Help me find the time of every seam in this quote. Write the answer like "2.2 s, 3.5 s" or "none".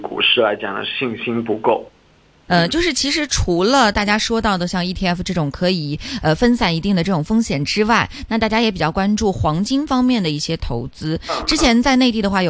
2.5 s